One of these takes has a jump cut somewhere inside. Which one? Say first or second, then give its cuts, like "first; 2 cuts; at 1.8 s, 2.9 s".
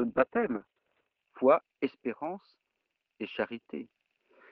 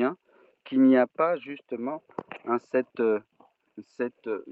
first; 1 cut; at 1.2 s